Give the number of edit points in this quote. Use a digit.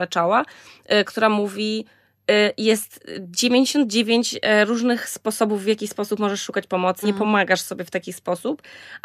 1